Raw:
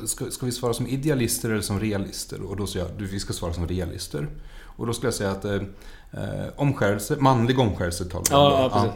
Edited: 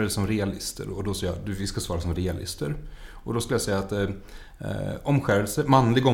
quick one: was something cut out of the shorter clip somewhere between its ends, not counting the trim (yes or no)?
no